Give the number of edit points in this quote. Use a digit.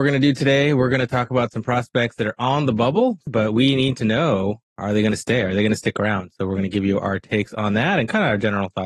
1